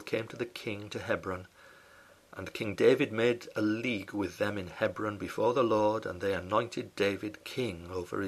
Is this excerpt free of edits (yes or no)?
yes